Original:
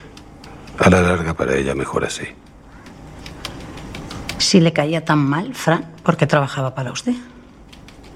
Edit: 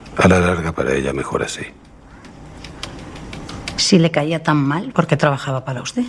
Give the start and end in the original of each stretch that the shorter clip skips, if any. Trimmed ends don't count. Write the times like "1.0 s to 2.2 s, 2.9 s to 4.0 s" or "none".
5.5 s to 6.0 s